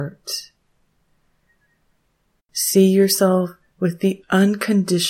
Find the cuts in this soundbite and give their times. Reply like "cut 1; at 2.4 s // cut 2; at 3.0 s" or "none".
cut 1; at 2.4 s